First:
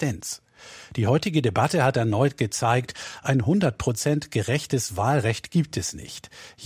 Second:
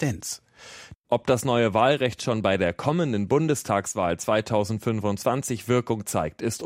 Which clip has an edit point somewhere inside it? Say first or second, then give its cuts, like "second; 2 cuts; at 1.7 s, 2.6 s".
second; 1 cut; at 0.9 s